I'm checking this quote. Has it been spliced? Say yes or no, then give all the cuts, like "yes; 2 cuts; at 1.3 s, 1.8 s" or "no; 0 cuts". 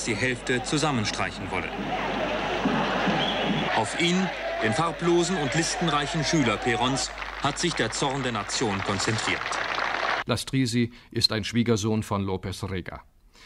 yes; 2 cuts; at 3.7 s, 10.2 s